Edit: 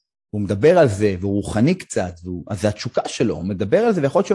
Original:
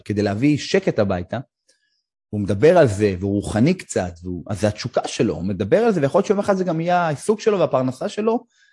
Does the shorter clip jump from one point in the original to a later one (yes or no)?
no